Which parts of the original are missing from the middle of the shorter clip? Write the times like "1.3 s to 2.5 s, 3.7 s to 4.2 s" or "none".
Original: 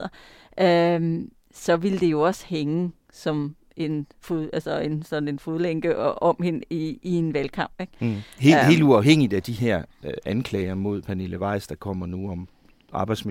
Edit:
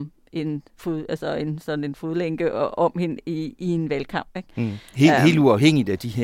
none